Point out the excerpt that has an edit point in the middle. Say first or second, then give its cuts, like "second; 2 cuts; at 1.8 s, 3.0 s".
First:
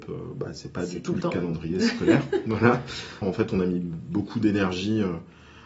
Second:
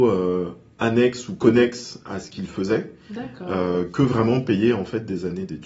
first; 1 cut; at 3.2 s